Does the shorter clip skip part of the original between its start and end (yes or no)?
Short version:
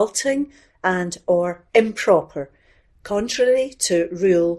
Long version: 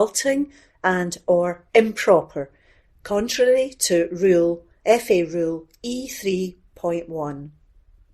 no